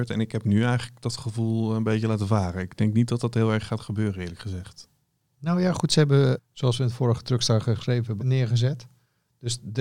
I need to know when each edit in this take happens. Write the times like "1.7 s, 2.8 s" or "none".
6.4 s, 8.2 s